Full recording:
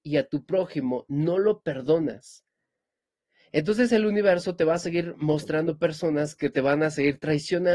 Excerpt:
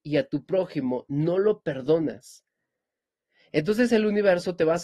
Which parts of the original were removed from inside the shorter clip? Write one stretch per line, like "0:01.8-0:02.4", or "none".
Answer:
none